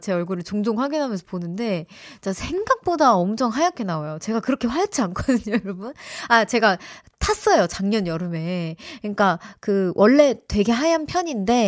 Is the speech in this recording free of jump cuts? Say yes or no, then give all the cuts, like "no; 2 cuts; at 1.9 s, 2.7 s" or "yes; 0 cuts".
yes; 0 cuts